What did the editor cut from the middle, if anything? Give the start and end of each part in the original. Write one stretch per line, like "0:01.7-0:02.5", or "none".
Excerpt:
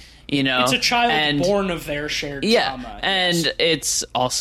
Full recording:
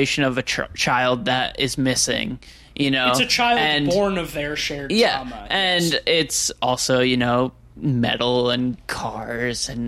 none